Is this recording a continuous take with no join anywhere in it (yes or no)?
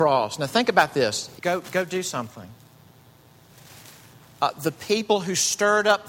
no